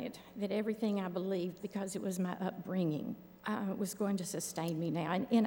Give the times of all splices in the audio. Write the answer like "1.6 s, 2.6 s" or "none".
1.6 s, 3.4 s